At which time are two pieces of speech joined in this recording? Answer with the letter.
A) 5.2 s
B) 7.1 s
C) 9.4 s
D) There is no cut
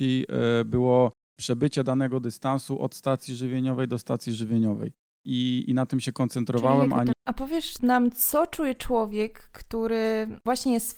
B